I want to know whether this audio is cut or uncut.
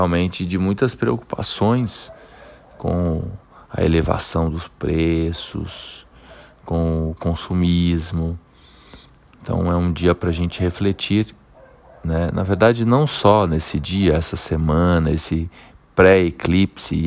uncut